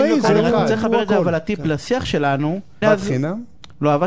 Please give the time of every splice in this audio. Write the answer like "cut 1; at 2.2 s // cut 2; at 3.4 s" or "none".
cut 1; at 2.8 s